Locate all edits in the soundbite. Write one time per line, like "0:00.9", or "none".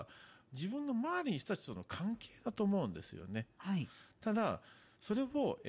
0:03.6